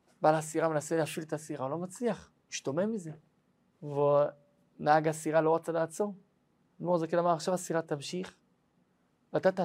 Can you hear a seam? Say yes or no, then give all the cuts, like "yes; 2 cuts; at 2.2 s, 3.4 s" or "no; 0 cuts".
yes; 2 cuts; at 3.7 s, 6.6 s